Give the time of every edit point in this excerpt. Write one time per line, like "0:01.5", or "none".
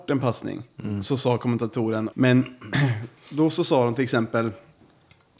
0:02.1